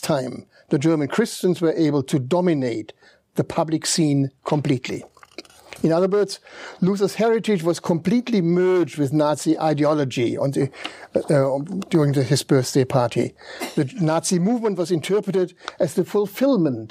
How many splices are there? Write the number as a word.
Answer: zero